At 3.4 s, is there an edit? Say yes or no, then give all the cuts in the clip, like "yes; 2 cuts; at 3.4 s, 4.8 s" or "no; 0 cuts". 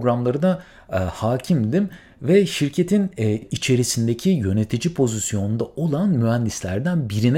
yes; 1 cut; at 3.4 s